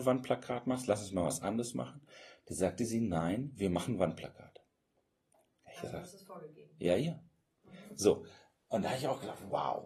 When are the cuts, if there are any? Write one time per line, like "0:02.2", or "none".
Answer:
none